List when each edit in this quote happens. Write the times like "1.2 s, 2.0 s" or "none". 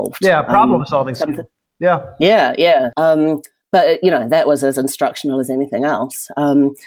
2.9 s